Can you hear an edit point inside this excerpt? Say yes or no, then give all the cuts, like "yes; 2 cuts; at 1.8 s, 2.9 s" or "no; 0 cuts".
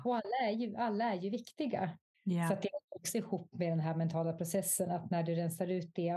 yes; 1 cut; at 2.1 s